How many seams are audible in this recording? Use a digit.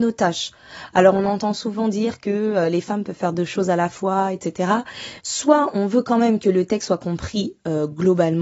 1